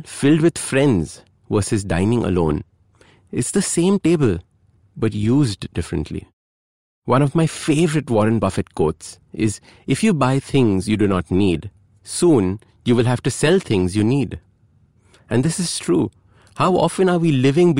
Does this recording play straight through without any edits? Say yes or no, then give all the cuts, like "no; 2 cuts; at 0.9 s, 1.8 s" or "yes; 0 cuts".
yes; 0 cuts